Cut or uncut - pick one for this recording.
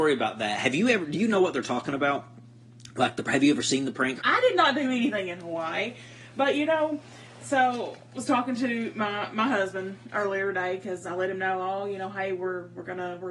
cut